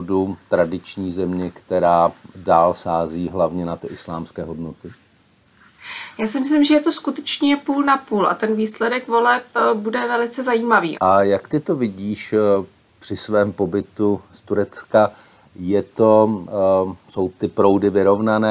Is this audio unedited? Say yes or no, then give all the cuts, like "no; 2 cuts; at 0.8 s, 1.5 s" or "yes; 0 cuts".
no; 1 cut; at 10.9 s